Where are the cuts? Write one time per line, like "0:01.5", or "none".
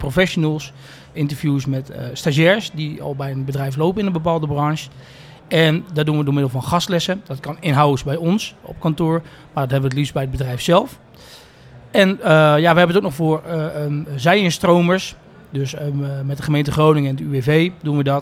0:01.1